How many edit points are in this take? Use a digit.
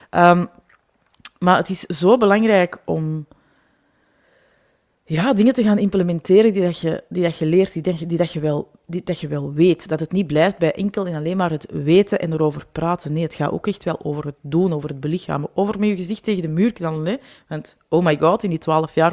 0